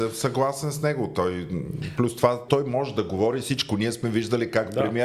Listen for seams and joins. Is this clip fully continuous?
no; 1 cut; at 2.5 s

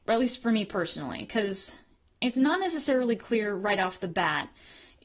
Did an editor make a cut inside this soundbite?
no; 0 cuts

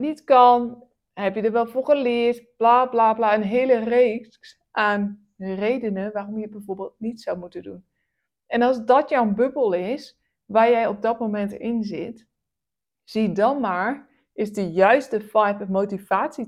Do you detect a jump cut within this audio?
no; 0 cuts

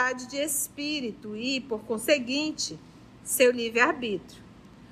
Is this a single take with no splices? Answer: yes; 0 cuts

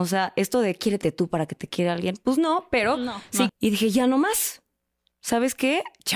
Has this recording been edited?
yes; 1 cut; at 3.5 s

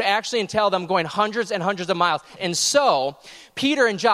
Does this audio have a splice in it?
yes; 1 cut; at 2.4 s

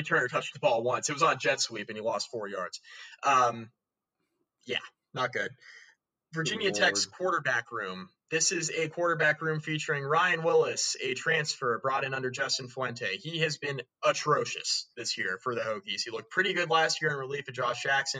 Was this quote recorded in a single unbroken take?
yes; 0 cuts

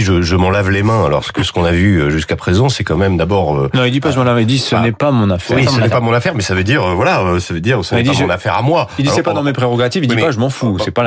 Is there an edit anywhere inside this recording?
no; 0 cuts

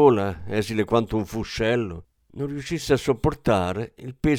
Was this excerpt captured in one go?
yes; 0 cuts

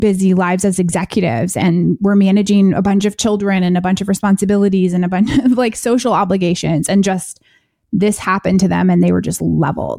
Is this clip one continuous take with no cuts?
yes; 0 cuts

